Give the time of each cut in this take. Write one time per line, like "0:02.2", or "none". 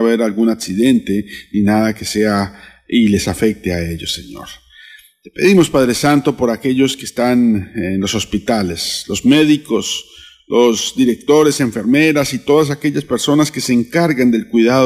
none